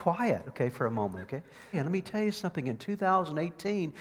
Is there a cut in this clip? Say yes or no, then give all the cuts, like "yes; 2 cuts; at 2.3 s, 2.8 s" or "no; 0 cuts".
yes; 1 cut; at 1.7 s